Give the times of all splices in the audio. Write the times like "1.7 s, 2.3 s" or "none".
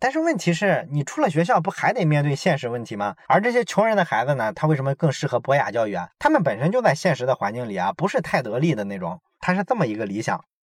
3.2 s, 9.4 s